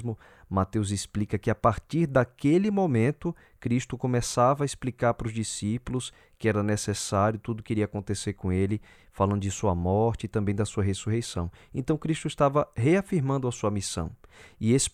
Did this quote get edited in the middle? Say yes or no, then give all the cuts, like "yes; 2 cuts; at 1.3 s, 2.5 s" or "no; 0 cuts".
no; 0 cuts